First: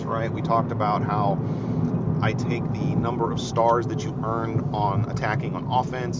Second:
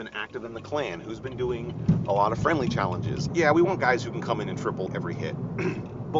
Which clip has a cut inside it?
second; 2 cuts; at 3.3 s, 4.9 s

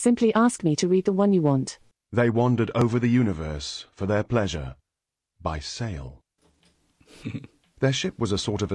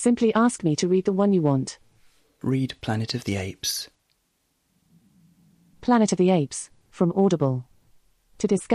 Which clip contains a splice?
first; 1 cut; at 1.9 s

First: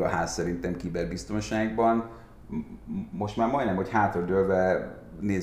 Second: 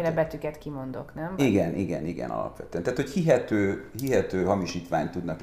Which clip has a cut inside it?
second; 1 cut; at 1.4 s

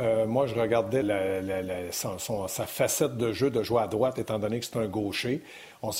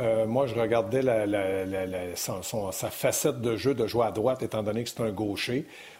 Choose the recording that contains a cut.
first; 1 cut; at 1.0 s

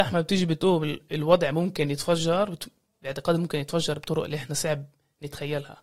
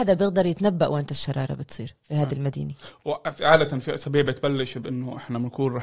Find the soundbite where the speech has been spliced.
second; 1 cut; at 2.0 s

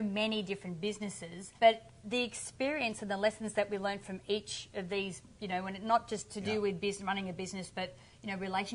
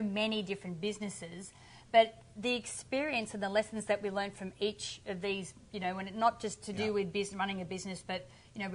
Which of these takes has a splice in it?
first; 1 cut; at 1.6 s

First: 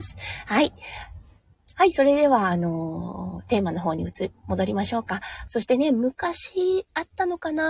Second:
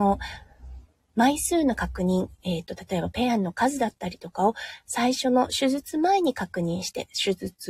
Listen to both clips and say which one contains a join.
first; 2 cuts; at 1.7 s, 5.5 s

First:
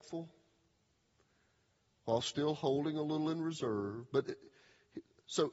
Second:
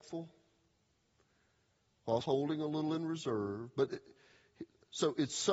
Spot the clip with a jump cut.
second; 1 cut; at 2.2 s

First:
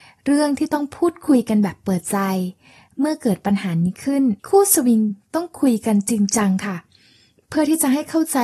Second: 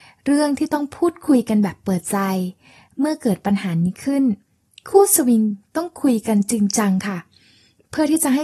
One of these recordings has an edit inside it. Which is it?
first; 1 cut; at 4.4 s

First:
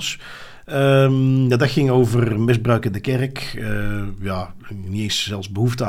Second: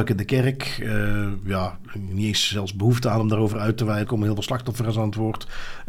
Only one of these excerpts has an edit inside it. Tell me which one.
second; 1 cut; at 4.0 s

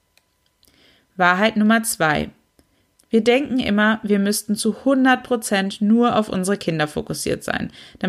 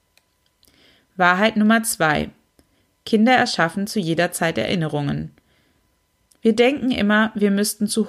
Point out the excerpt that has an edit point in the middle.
first; 1 cut; at 2.9 s

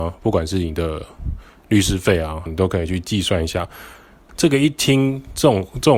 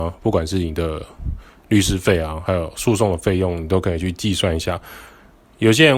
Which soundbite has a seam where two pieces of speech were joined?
first; 2 cuts; at 2.5 s, 4.3 s

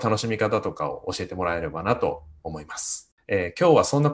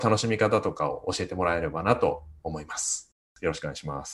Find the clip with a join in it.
first; 1 cut; at 3.2 s

